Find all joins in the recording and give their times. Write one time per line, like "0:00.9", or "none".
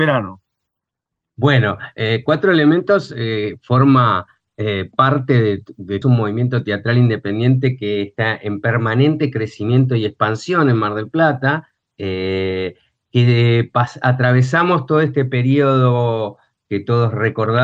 0:06.0